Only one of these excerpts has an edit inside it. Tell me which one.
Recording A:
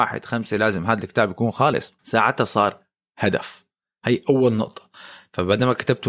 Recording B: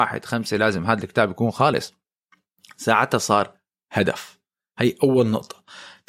A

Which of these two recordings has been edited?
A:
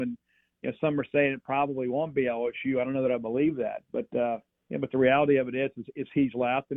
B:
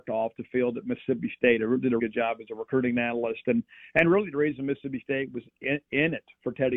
B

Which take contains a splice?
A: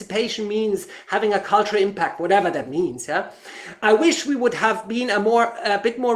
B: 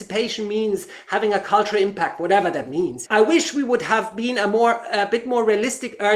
B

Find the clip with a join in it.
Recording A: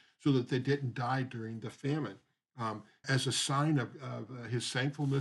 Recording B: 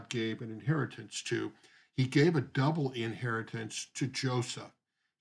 A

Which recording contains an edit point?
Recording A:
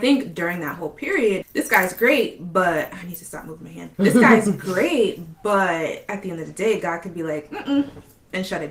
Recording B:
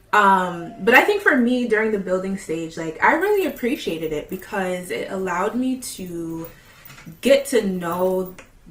A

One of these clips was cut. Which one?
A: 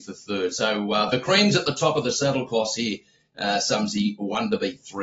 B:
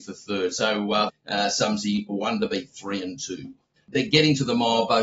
B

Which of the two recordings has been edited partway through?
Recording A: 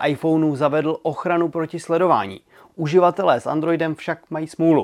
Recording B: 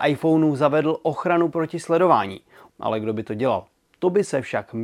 B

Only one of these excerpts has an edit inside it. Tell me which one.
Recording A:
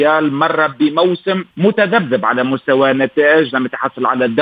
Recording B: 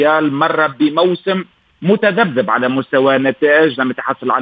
A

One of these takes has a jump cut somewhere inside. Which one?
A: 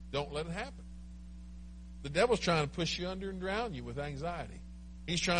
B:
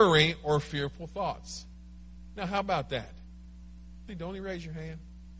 B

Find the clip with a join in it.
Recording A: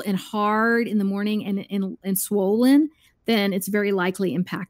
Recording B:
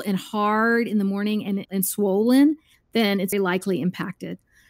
B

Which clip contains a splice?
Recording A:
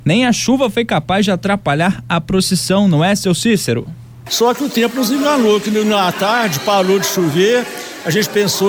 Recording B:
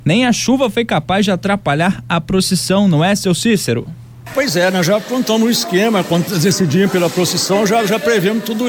A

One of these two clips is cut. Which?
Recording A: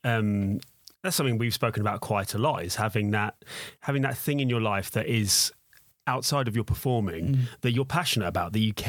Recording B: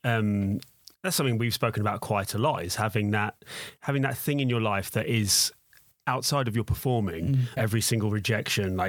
B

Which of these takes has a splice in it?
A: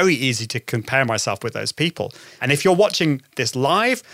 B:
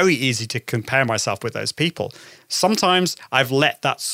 A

